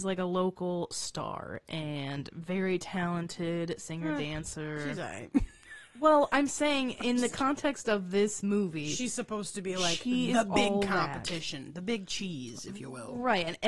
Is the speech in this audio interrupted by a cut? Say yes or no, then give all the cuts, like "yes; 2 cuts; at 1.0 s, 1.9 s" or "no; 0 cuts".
no; 0 cuts